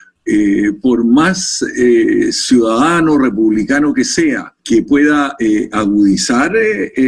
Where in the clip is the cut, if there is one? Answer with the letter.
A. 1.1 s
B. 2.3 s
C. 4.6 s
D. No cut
C